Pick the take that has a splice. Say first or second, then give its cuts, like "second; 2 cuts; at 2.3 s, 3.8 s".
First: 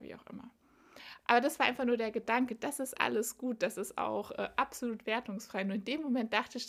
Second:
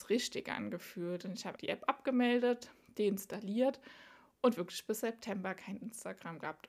second; 1 cut; at 1.6 s